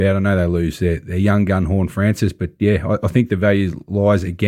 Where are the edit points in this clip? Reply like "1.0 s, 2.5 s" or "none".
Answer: none